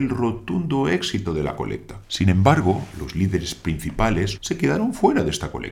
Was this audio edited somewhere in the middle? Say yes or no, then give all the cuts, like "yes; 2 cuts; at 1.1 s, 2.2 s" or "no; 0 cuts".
yes; 2 cuts; at 2.0 s, 4.3 s